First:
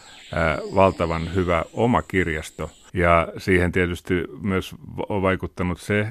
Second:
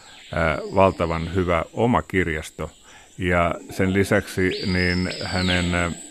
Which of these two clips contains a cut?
first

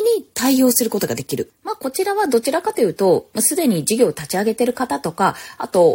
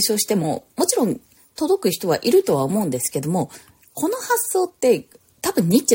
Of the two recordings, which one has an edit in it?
first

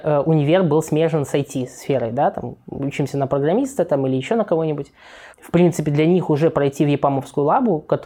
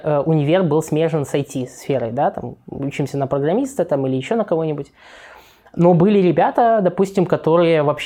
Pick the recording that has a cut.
first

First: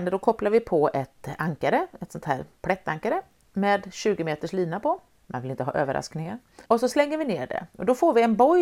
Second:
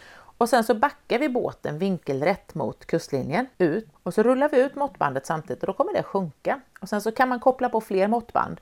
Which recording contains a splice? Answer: first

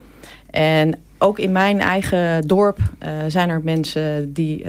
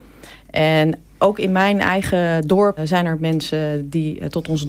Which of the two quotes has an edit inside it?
second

